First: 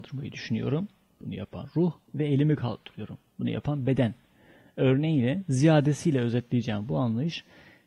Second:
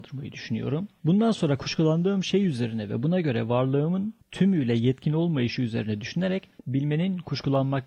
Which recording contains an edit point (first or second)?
second